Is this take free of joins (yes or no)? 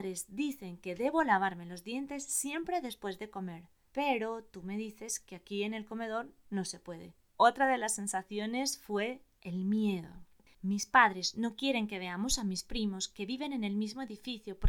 no